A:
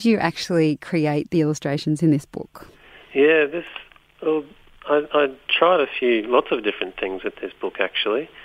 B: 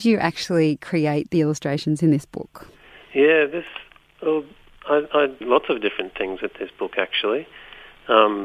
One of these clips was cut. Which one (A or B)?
B